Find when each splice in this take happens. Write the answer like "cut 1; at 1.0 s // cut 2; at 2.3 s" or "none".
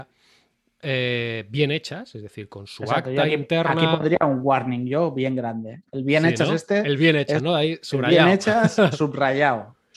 none